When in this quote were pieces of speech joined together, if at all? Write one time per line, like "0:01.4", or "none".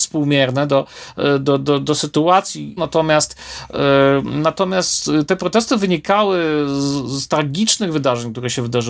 0:02.8